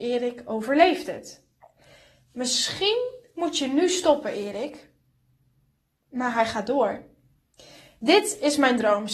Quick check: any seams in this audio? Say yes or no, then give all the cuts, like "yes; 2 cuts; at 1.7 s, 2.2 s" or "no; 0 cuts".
no; 0 cuts